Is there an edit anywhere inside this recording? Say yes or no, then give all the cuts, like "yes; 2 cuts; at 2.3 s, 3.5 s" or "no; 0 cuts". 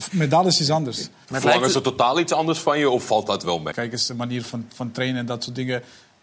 yes; 2 cuts; at 1.2 s, 3.7 s